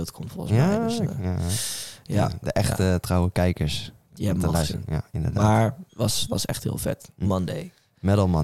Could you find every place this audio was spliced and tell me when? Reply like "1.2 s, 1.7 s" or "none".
3.0 s, 5.9 s, 7.2 s